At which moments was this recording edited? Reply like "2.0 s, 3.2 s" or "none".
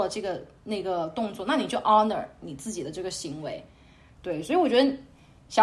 4.2 s

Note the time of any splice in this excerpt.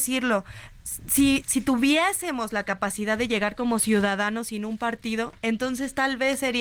1.4 s

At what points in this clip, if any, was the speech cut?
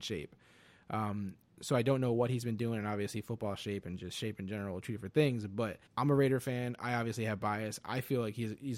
5.9 s

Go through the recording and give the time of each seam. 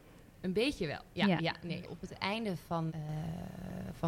1.8 s, 2.9 s

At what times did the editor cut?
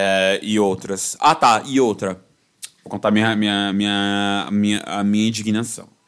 none

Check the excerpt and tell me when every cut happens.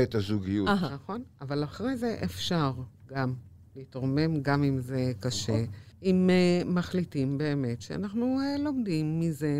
5.9 s

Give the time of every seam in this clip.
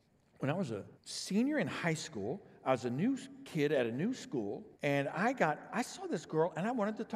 0.9 s, 4.7 s

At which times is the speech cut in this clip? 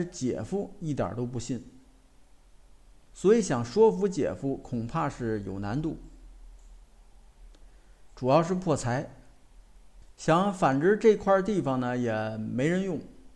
8.1 s, 10.1 s

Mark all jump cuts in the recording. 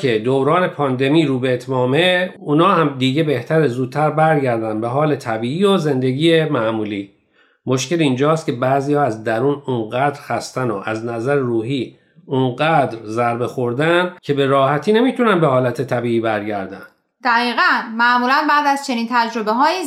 14.2 s

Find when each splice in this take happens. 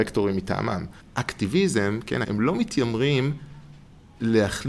1.0 s, 2.2 s

